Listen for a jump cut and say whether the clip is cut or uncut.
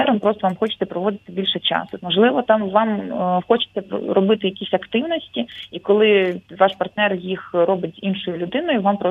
cut